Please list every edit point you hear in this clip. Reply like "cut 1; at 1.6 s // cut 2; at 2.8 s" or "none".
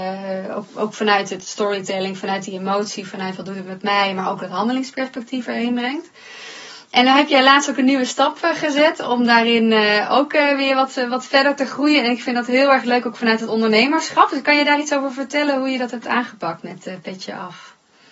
none